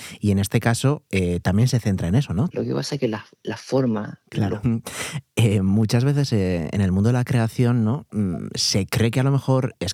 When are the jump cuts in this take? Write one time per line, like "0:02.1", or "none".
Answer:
0:02.5
0:04.6